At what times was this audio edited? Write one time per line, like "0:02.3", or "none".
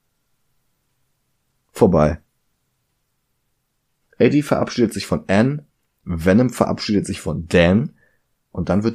none

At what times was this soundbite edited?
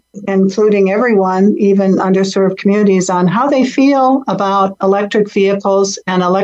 none

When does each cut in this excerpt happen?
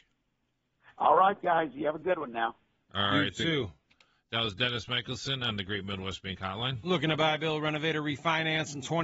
none

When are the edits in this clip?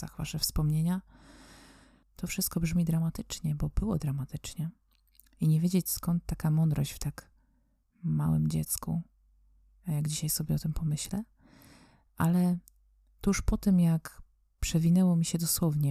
0:02.0

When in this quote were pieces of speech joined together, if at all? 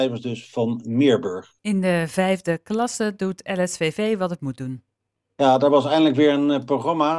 0:01.6

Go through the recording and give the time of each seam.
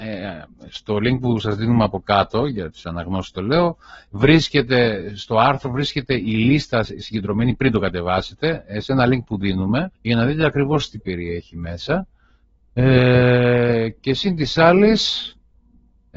0:10.0

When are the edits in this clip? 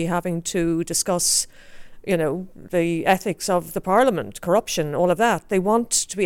none

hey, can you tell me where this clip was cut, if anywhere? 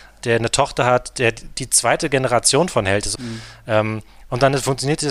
0:03.2

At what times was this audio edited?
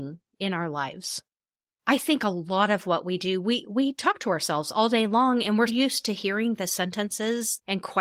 0:01.8
0:05.7

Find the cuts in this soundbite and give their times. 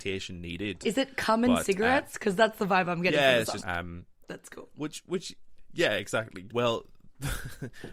0:03.6
0:06.5

